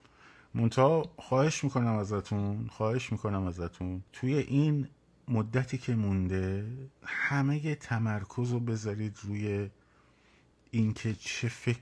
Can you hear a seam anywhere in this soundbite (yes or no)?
yes